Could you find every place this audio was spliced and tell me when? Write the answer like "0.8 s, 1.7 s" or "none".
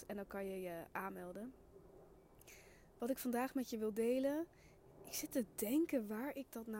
none